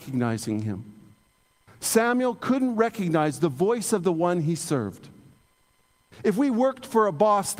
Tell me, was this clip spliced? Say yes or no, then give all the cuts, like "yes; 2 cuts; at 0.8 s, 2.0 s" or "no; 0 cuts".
no; 0 cuts